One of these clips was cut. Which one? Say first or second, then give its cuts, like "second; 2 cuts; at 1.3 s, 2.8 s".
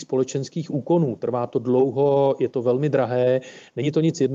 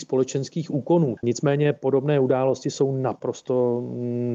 second; 1 cut; at 1.2 s